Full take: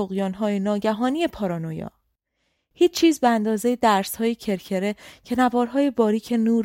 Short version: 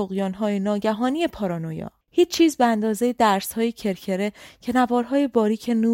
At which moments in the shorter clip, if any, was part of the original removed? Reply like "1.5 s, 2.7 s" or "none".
2.0 s